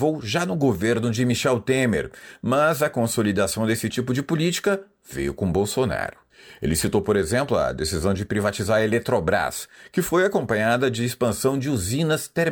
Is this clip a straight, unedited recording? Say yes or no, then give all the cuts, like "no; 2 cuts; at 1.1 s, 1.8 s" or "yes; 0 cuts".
yes; 0 cuts